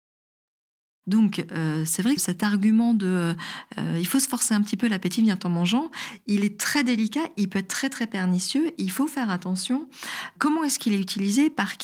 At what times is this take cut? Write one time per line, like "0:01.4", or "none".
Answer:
0:02.2